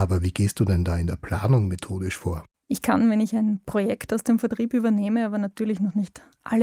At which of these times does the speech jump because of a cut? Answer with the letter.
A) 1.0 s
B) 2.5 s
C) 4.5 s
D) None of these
B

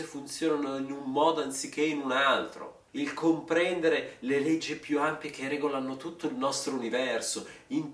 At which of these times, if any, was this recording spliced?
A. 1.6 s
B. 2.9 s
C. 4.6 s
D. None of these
B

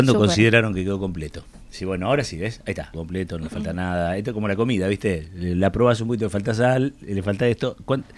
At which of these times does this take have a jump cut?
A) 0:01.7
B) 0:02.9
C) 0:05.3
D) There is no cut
B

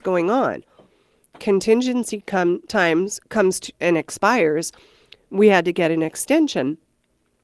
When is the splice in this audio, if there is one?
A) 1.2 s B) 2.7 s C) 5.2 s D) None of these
D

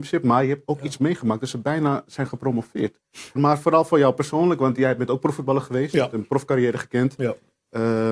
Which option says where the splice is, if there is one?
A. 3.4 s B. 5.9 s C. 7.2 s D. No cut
A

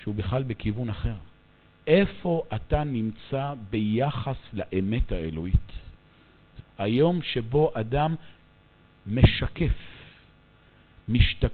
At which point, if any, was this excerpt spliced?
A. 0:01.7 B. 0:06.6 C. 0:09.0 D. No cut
B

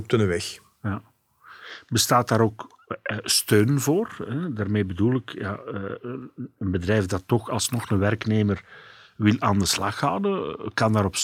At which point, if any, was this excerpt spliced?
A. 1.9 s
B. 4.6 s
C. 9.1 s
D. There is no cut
D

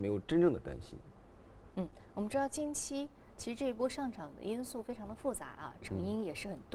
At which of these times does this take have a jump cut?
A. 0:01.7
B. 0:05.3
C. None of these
A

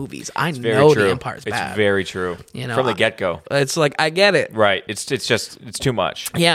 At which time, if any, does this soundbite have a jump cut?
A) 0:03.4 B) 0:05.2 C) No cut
A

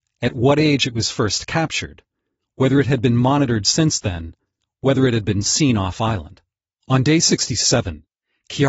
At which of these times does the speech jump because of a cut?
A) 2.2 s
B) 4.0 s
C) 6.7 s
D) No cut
C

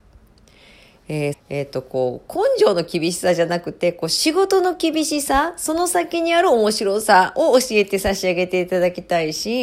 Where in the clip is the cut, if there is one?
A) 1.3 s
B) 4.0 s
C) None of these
A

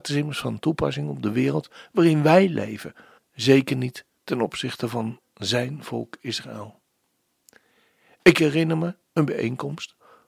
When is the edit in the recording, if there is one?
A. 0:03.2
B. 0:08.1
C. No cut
A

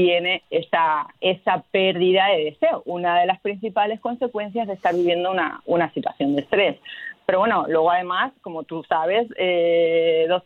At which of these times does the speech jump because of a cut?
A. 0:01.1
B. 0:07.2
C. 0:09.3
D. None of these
A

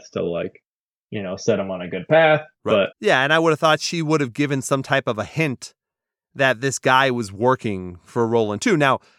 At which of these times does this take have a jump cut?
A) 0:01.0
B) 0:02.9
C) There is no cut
B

